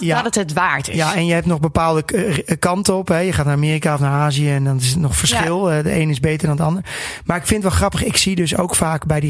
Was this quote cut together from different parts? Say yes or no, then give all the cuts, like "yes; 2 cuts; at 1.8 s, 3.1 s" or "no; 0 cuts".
no; 0 cuts